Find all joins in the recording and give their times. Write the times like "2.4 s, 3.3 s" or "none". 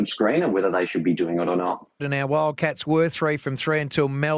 2.0 s